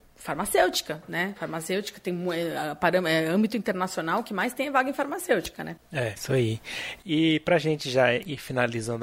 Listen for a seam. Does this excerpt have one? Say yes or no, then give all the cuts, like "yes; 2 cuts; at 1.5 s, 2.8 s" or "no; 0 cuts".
no; 0 cuts